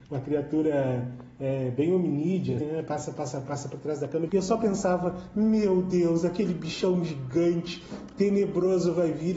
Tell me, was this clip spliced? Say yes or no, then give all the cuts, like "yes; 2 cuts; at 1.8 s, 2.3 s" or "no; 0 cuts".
yes; 2 cuts; at 2.6 s, 4.3 s